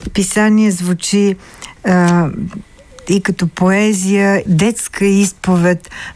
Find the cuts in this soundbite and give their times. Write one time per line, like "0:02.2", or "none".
0:04.5